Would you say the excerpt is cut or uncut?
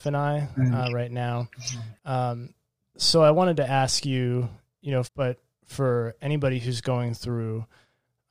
cut